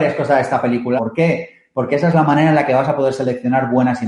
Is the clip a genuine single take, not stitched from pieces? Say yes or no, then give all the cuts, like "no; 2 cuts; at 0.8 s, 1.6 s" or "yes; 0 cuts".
no; 1 cut; at 1.0 s